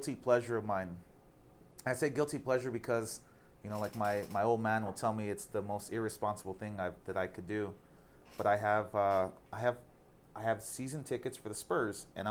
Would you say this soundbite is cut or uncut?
uncut